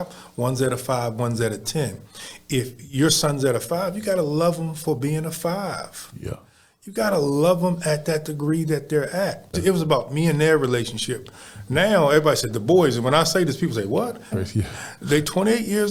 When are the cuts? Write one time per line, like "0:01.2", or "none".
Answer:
0:09.5
0:14.3